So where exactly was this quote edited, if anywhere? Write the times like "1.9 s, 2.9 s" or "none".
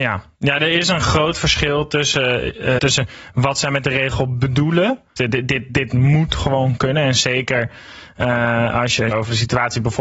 2.8 s, 5.2 s, 9.1 s